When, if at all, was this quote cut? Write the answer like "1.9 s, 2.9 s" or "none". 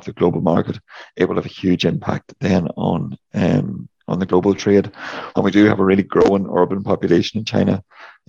4.0 s, 5.3 s